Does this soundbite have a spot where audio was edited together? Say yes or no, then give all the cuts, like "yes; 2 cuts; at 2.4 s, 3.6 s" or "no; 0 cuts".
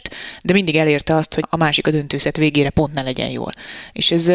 yes; 1 cut; at 1.4 s